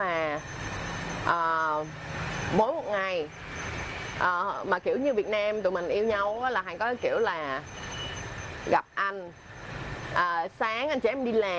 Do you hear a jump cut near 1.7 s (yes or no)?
no